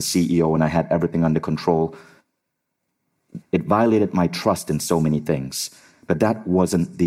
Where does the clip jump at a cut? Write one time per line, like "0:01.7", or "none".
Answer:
0:03.4